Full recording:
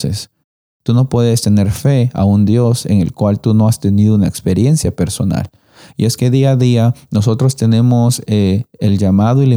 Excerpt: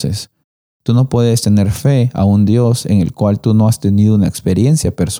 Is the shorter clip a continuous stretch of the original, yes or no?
yes